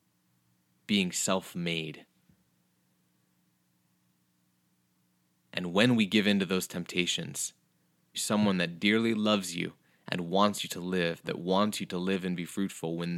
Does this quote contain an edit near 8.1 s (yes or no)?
yes